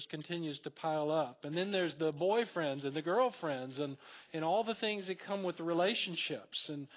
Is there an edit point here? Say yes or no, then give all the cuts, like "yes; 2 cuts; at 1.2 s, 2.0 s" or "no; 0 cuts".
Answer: no; 0 cuts